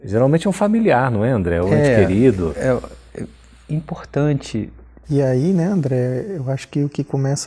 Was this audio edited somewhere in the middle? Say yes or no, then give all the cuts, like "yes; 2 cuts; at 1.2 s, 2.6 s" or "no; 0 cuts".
yes; 1 cut; at 5.0 s